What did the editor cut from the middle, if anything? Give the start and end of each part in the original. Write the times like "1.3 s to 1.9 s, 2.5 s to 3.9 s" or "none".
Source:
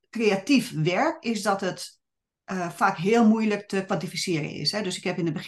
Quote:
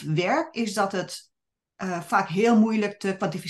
none